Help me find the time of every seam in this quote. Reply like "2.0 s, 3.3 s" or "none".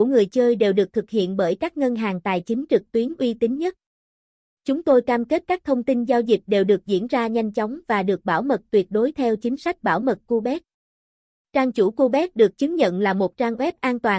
none

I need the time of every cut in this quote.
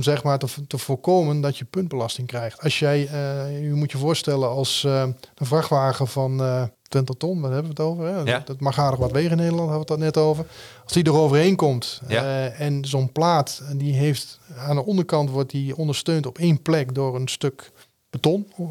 6.7 s

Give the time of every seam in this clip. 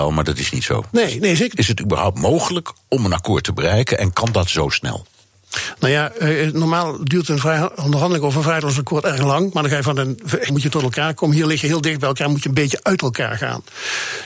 1.6 s, 10.5 s

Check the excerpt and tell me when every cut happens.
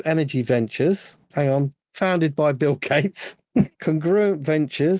1.3 s, 3.7 s

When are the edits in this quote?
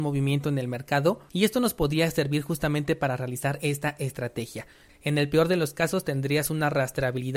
4.9 s

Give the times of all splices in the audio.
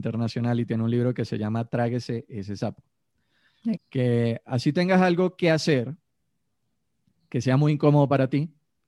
3.8 s

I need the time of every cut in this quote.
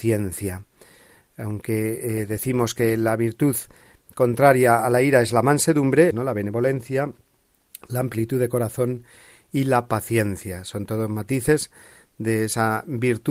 6.1 s

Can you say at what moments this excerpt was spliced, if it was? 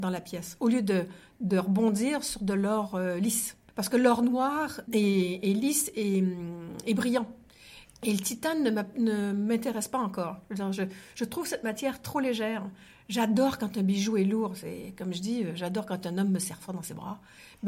7.8 s

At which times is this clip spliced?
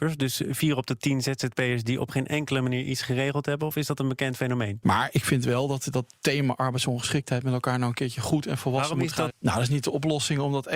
4.8 s, 9.3 s

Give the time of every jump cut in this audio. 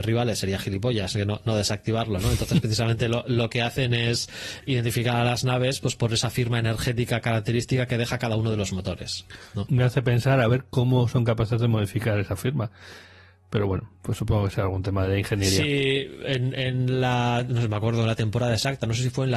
9.7 s

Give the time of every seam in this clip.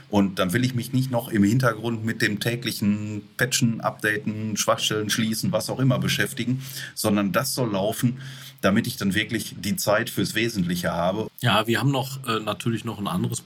11.3 s

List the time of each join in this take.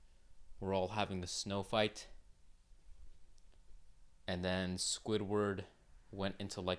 none

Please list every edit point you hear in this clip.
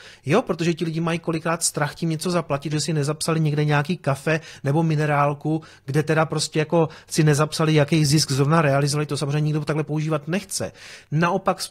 2.7 s, 9.1 s

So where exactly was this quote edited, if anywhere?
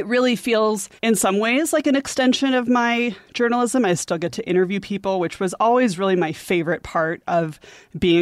1.0 s

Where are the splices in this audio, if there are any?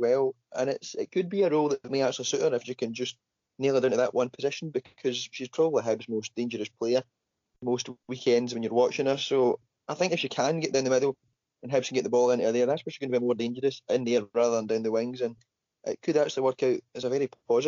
none

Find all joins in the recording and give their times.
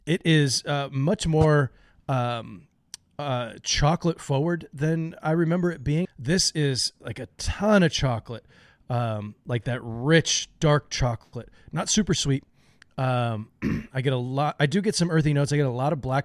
6.0 s

